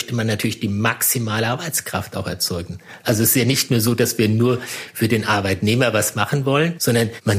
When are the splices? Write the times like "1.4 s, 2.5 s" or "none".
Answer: 3.0 s